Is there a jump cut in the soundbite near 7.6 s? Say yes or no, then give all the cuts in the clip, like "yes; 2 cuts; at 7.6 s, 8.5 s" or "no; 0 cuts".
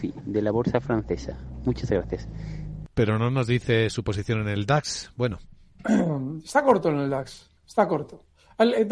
yes; 1 cut; at 7.6 s